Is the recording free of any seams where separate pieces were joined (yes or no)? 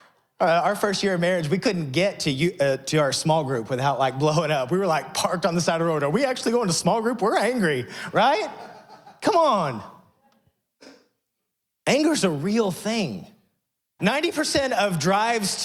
no